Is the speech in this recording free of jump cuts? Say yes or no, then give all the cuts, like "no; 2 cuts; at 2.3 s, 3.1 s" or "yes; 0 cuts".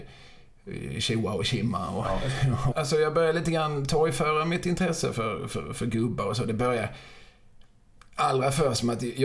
no; 1 cut; at 2.7 s